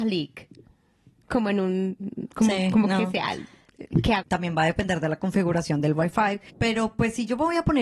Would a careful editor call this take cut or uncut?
cut